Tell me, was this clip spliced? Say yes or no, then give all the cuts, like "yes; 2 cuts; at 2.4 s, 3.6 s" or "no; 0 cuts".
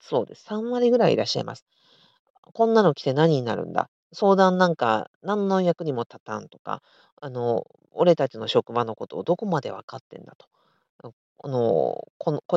no; 0 cuts